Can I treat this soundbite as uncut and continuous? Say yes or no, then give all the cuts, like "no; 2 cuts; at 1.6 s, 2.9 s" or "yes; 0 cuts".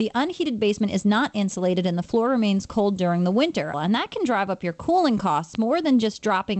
no; 1 cut; at 3.7 s